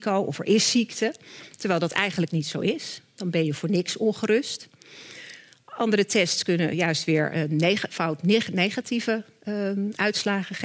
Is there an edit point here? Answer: no; 0 cuts

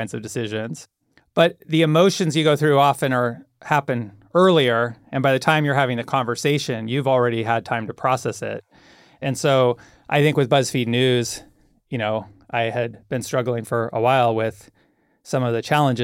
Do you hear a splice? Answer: no; 0 cuts

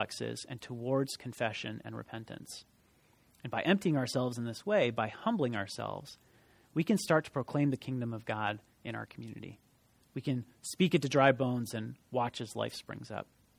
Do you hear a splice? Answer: no; 0 cuts

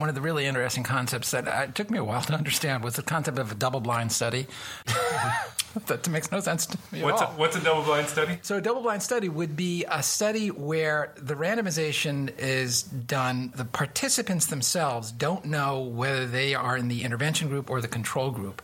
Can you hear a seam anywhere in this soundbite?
yes; 2 cuts; at 4.8 s, 13.5 s

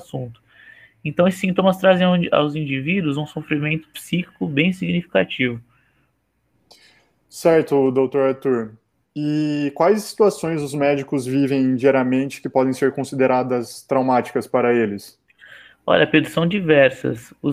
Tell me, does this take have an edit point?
no; 0 cuts

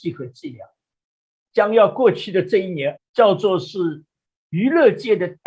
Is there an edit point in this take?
yes; 2 cuts; at 1.5 s, 3.0 s

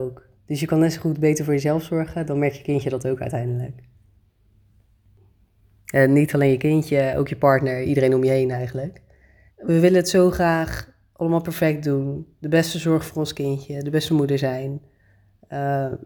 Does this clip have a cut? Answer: yes; 1 cut; at 9.5 s

